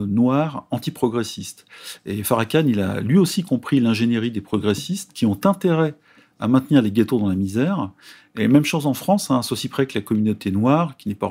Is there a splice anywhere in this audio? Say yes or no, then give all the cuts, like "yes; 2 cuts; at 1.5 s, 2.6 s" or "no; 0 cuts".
no; 0 cuts